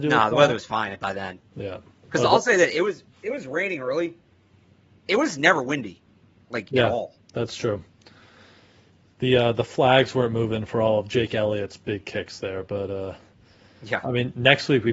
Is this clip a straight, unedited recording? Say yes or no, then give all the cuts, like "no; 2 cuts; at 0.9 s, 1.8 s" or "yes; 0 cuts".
yes; 0 cuts